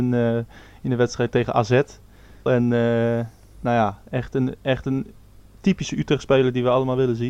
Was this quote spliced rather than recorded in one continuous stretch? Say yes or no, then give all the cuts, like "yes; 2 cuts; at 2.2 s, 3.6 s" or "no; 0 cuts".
yes; 1 cut; at 2.5 s